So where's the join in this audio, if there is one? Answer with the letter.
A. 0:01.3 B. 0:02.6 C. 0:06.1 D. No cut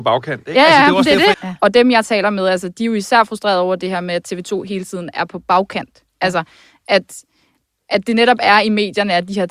A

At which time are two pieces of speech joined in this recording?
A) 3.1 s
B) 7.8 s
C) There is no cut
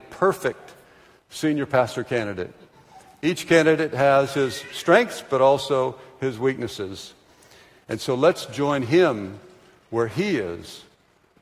B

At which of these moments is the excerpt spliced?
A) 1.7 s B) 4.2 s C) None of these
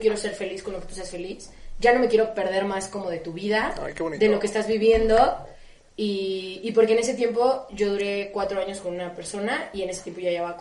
C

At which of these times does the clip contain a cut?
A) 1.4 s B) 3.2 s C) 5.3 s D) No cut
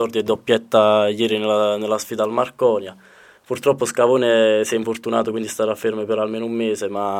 D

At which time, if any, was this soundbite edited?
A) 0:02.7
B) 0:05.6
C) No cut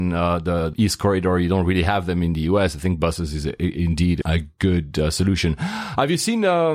C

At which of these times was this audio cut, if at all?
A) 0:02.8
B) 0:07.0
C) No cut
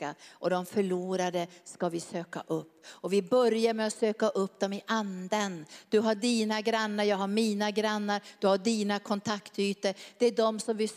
C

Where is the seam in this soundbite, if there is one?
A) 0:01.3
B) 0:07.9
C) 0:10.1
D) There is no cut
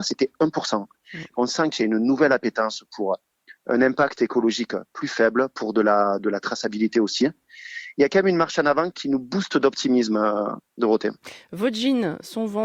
B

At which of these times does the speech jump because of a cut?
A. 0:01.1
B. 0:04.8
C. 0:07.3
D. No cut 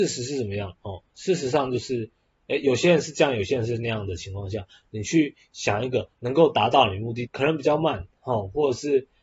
C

